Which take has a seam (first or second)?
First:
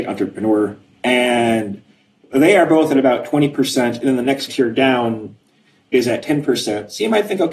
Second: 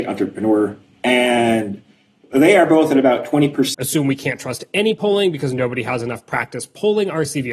second